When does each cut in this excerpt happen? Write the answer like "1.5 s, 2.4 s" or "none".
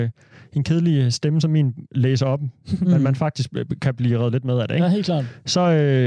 none